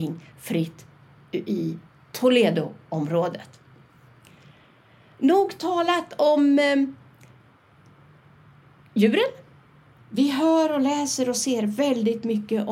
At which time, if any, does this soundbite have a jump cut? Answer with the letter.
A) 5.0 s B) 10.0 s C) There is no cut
B